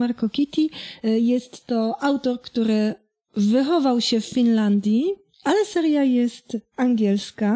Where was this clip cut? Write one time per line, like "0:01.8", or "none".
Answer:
none